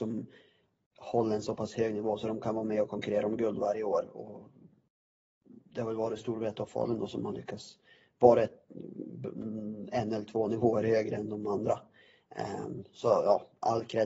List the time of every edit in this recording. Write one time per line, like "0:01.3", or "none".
none